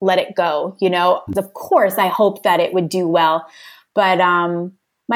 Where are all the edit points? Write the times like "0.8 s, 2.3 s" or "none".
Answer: 1.3 s